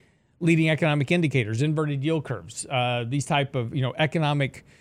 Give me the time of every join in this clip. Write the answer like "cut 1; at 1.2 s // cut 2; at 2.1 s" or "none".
none